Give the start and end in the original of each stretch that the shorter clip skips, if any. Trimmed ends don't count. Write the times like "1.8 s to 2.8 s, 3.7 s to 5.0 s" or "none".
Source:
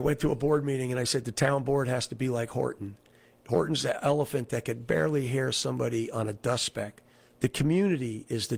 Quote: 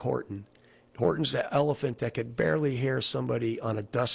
none